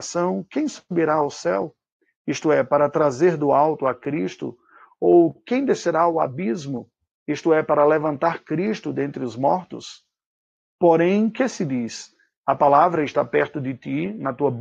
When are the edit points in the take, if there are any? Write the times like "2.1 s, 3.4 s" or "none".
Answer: none